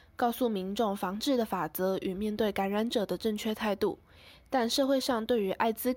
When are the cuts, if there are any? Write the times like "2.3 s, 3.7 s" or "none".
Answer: none